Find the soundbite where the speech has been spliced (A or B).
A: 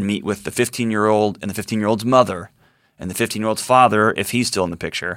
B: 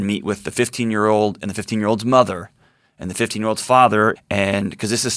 B